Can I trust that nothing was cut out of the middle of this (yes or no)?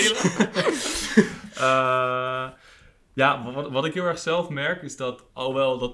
yes